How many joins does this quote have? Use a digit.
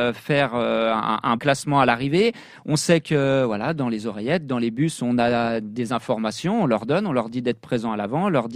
1